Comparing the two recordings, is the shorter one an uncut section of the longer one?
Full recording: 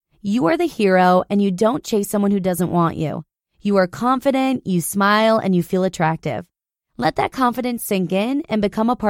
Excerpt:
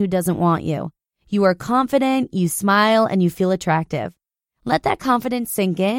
yes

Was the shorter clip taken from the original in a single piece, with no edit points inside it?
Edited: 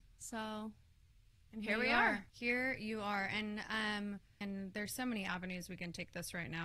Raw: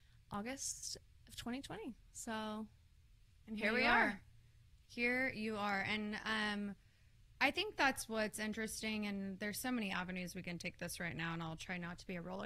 no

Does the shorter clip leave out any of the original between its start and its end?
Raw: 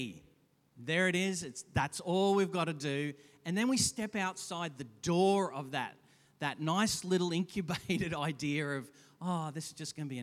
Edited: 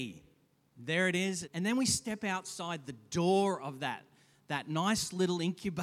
yes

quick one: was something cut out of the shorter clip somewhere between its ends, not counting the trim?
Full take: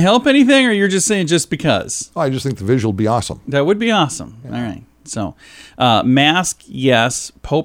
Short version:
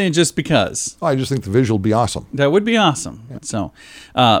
yes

